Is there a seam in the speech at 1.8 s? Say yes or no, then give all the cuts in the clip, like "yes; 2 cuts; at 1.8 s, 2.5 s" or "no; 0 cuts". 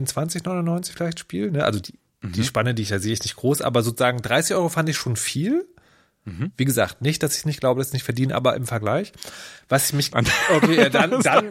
yes; 2 cuts; at 1.8 s, 10.1 s